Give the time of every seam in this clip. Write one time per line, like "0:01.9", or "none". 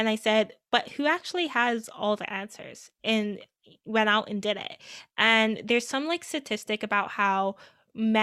none